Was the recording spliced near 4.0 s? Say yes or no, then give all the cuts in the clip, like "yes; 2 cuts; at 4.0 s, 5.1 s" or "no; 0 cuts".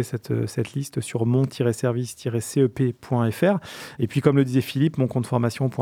yes; 1 cut; at 4.0 s